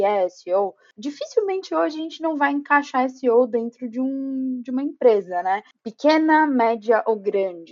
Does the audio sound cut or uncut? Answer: uncut